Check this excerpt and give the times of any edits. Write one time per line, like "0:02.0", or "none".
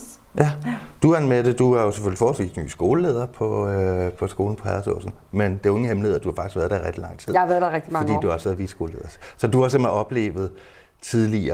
none